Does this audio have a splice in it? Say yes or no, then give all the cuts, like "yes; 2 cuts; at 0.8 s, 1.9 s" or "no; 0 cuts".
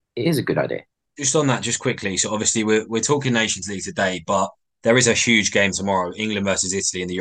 no; 0 cuts